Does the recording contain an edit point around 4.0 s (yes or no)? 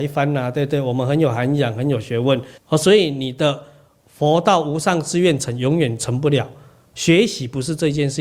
no